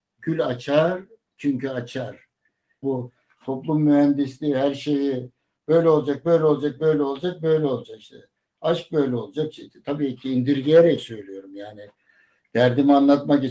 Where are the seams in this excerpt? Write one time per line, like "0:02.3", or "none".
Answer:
0:02.8